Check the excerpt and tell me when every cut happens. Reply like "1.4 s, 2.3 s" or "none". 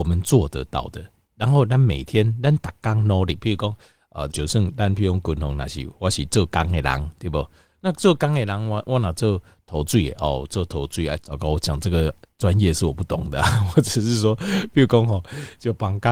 4.3 s, 11.2 s